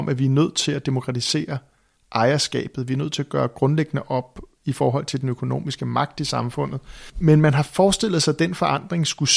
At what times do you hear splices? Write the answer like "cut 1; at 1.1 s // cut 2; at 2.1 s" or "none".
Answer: none